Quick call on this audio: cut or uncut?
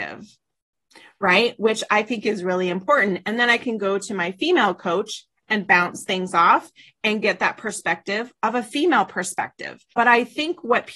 cut